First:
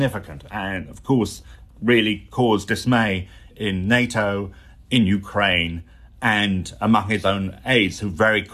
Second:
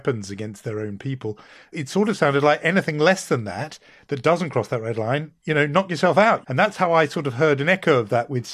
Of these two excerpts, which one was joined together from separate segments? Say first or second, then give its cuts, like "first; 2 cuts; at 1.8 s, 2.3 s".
second; 1 cut; at 6.4 s